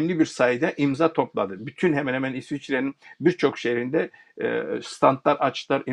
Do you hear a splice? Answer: no; 0 cuts

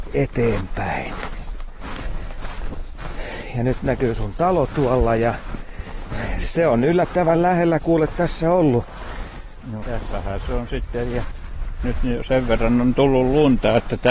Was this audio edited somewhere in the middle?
yes; 1 cut; at 9.8 s

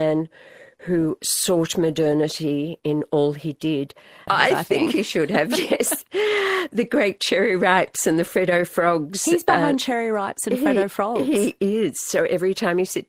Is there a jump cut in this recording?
yes; 1 cut; at 4.3 s

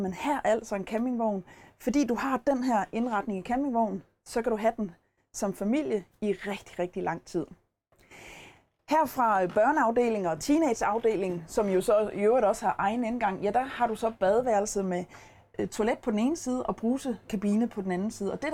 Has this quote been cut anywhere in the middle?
no; 0 cuts

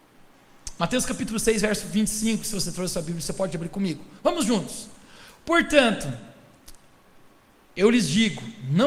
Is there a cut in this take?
no; 0 cuts

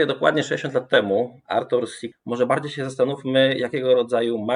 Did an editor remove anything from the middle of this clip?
yes; 1 cut; at 2.1 s

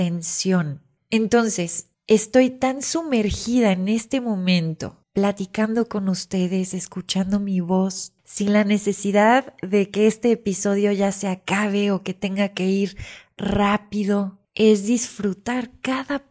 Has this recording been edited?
yes; 1 cut; at 5.0 s

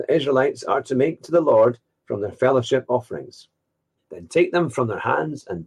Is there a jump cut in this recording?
yes; 1 cut; at 4.0 s

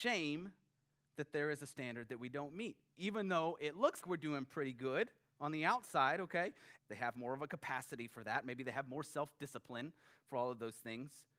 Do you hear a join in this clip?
yes; 2 cuts; at 4.0 s, 6.8 s

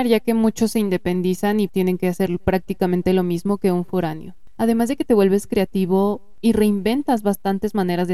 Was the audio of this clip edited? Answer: yes; 2 cuts; at 1.7 s, 4.6 s

